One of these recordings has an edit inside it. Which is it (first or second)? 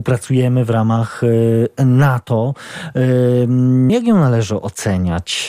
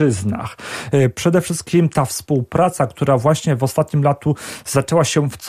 first